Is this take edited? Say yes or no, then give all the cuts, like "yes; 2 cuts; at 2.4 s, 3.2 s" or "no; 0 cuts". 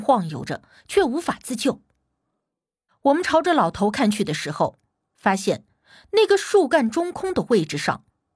yes; 1 cut; at 2.9 s